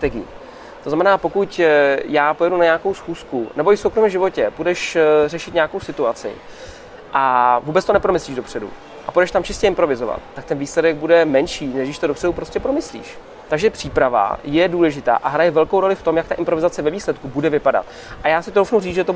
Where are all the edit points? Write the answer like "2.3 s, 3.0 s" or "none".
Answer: 13.5 s